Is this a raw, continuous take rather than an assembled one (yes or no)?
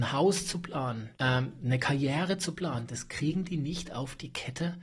no